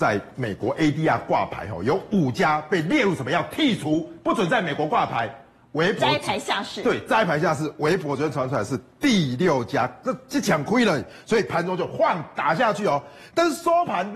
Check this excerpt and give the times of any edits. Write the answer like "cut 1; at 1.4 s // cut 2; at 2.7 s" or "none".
none